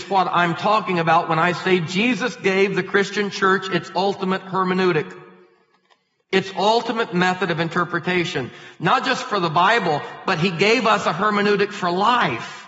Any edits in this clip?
no; 0 cuts

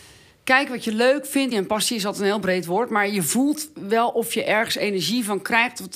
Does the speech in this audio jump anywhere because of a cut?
yes; 1 cut; at 1.5 s

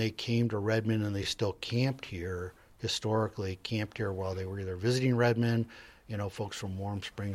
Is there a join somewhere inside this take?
no; 0 cuts

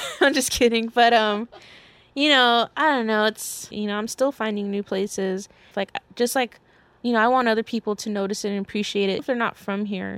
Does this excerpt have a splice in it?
yes; 3 cuts; at 3.7 s, 5.7 s, 9.2 s

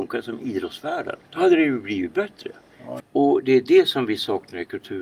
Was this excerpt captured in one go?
no; 2 cuts; at 1.2 s, 3.0 s

